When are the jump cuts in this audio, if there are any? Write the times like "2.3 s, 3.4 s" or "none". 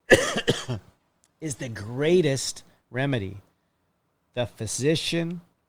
none